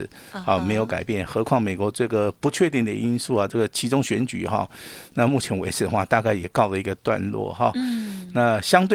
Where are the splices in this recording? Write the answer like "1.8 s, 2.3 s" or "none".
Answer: none